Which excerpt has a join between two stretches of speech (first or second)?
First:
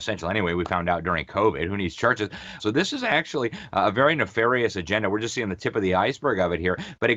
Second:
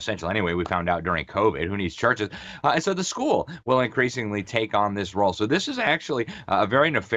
first